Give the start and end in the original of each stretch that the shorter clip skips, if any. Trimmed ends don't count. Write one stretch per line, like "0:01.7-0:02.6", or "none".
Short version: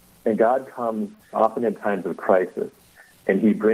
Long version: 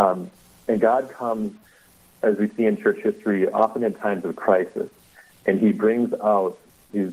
0:01.8-0:03.5